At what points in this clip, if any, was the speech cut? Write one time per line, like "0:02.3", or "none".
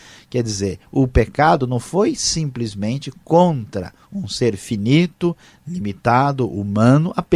none